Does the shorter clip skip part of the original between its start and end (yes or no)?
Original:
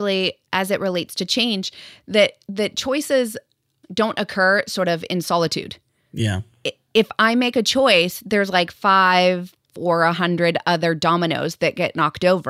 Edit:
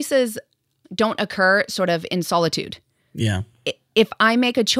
no